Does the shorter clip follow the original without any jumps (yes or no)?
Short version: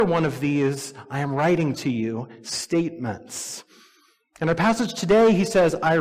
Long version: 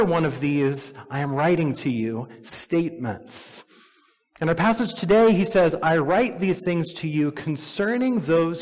yes